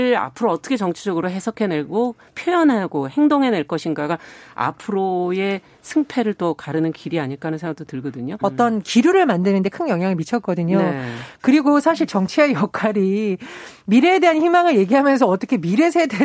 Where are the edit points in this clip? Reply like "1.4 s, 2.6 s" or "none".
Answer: 8.4 s